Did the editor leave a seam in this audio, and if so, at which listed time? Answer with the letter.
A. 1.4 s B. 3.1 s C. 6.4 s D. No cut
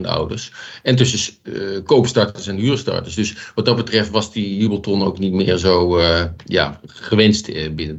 D